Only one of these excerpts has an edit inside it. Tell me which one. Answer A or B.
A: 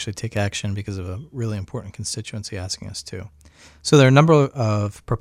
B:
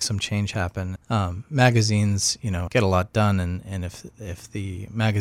B